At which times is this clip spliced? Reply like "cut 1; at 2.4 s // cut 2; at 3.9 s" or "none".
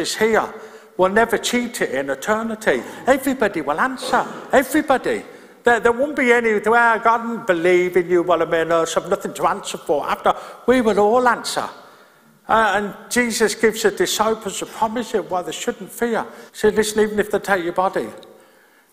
cut 1; at 16.5 s